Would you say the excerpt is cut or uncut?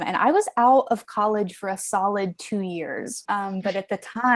cut